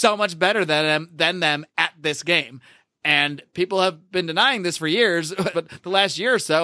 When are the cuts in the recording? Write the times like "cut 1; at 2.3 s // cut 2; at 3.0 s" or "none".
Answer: cut 1; at 5.5 s

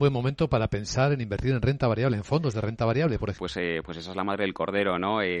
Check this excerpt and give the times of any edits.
cut 1; at 3.4 s

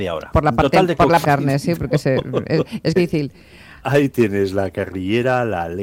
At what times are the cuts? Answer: cut 1; at 1.2 s // cut 2; at 3.0 s

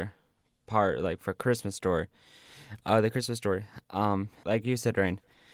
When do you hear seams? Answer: cut 1; at 4.4 s

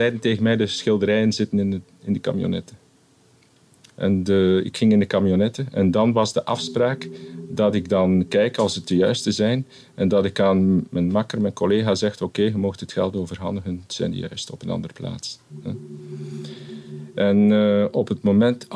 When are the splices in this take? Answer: none

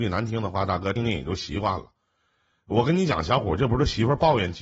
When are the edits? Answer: cut 1; at 1.0 s

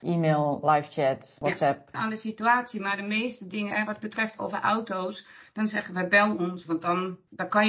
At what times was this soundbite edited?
cut 1; at 1.9 s // cut 2; at 6.7 s

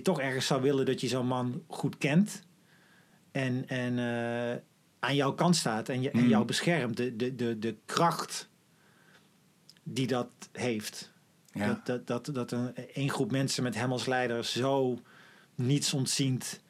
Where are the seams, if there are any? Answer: none

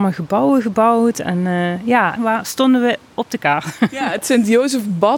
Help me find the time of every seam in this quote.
cut 1; at 2.2 s

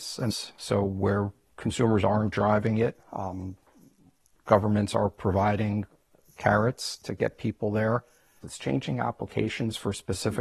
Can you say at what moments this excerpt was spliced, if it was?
cut 1; at 8.4 s

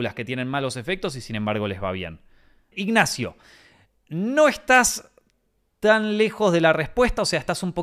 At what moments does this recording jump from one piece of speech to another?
cut 1; at 2.7 s

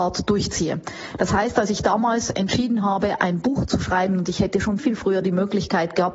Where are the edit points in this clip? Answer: cut 1; at 4.8 s

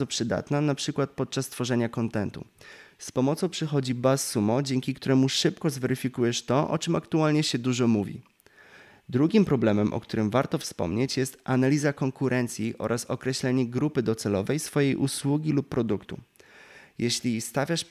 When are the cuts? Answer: none

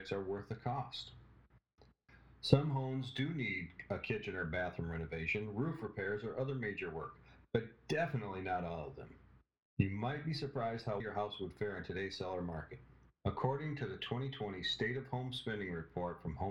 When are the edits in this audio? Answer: cut 1; at 11.0 s // cut 2; at 13.2 s

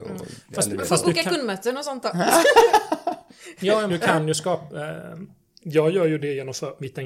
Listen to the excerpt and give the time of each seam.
cut 1; at 3.9 s

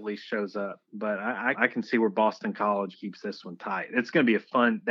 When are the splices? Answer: cut 1; at 1.5 s // cut 2; at 2.9 s

